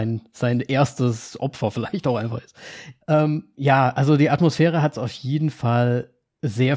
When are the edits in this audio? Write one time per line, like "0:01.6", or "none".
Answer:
0:03.0